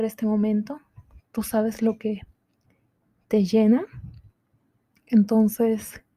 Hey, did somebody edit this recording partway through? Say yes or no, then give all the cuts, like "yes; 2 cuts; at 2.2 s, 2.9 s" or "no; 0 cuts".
no; 0 cuts